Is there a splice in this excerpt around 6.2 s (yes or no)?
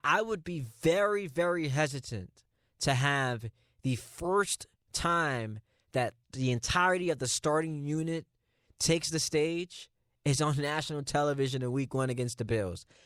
yes